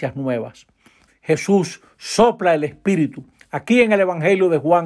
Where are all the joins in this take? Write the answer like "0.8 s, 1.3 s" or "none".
1.1 s